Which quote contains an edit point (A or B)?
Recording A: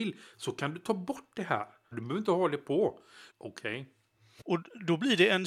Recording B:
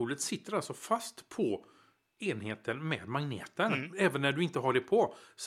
A